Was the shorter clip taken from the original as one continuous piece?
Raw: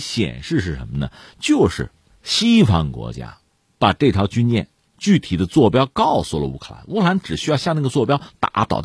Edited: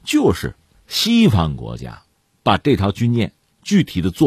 yes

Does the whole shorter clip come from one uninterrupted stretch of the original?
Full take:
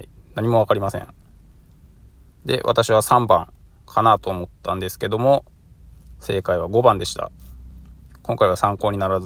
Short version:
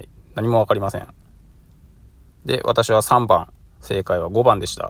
no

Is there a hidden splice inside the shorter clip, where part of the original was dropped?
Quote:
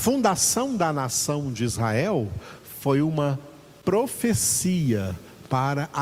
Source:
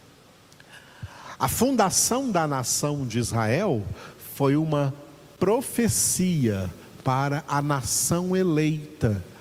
no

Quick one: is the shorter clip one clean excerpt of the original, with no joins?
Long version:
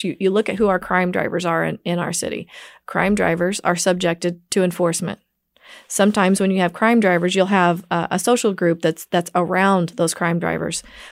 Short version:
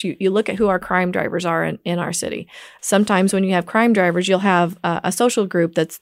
no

